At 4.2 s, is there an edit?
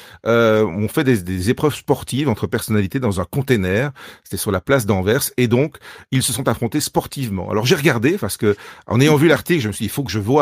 no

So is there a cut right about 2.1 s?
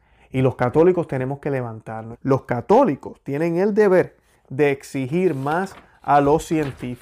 yes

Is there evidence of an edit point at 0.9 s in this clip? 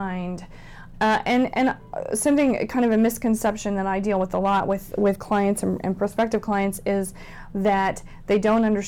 yes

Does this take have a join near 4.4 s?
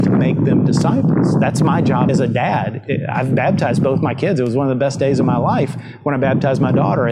no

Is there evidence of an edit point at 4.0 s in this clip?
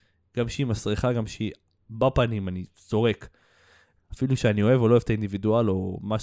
yes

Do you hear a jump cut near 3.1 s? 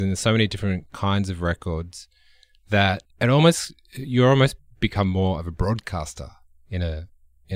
yes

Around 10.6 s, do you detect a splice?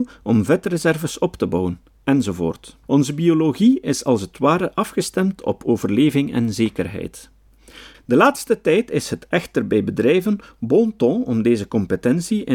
no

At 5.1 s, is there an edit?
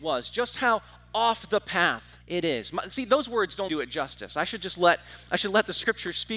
no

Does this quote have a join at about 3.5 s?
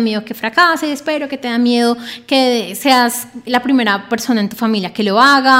yes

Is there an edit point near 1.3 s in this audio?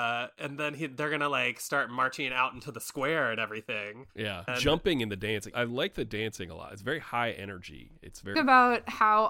no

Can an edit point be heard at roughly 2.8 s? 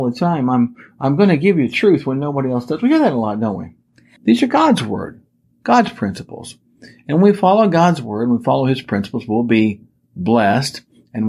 no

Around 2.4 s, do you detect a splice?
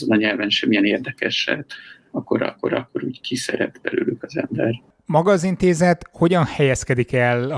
no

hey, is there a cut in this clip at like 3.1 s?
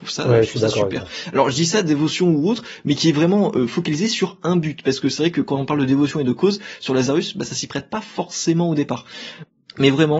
no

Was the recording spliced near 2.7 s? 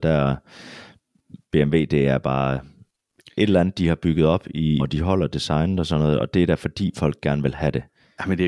no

